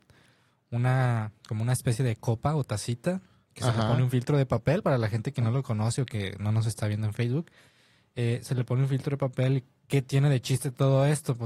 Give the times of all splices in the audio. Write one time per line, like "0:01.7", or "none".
none

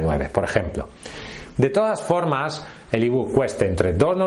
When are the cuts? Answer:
0:01.5
0:02.8

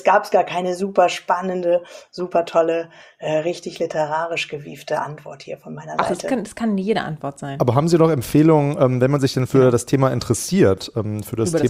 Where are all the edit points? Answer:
none

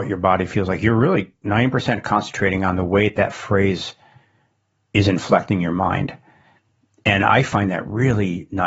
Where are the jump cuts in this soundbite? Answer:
none

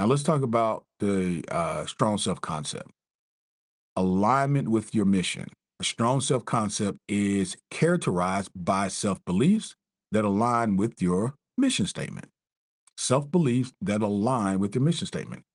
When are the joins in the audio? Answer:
none

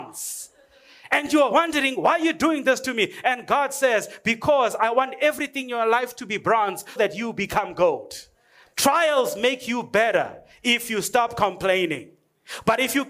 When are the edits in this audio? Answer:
0:07.0
0:08.7

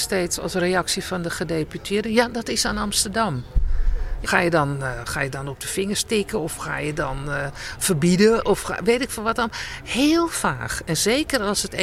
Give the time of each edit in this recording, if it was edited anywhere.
0:04.2

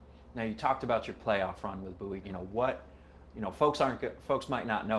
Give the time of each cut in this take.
0:02.2

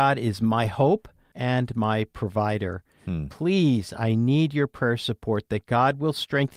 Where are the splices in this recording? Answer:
0:01.3

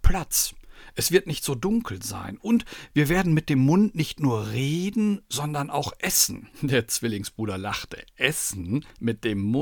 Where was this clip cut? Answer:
0:06.5

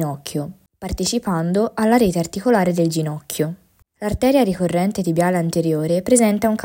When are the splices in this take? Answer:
none

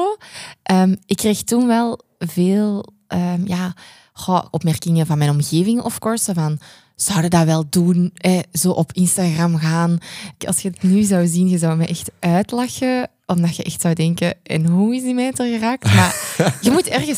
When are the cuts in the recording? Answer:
0:04.5
0:10.4

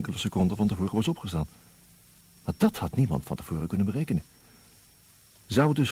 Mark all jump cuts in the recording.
none

